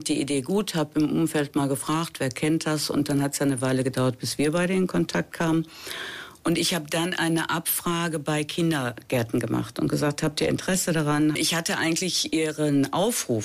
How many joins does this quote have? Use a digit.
1